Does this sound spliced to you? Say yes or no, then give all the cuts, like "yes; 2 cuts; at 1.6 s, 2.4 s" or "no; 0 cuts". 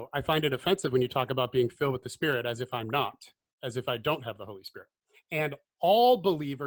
yes; 1 cut; at 5.1 s